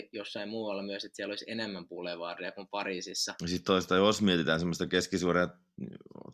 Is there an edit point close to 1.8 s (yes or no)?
no